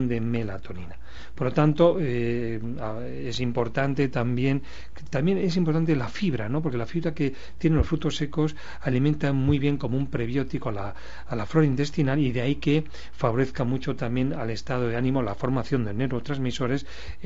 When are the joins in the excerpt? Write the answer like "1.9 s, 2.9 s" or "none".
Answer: none